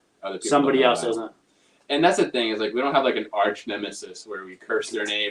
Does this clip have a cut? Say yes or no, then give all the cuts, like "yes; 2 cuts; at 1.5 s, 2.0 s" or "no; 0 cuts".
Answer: no; 0 cuts